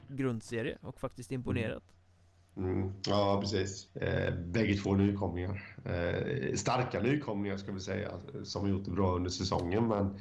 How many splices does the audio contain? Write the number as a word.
one